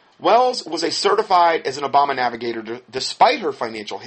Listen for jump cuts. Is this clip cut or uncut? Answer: uncut